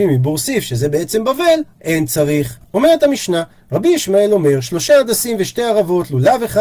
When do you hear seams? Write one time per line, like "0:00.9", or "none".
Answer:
0:02.6